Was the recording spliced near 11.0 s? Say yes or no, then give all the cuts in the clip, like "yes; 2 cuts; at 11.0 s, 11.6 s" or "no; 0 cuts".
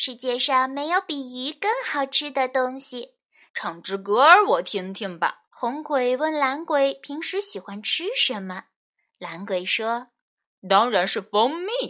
no; 2 cuts; at 3.5 s, 5.5 s